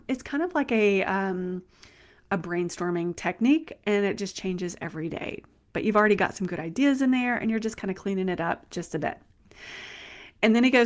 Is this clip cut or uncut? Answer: uncut